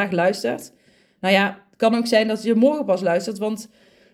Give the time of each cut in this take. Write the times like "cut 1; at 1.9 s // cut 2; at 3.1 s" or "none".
none